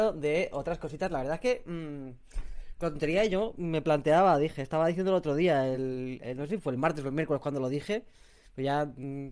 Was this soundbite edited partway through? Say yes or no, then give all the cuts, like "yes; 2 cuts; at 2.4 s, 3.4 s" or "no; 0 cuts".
no; 0 cuts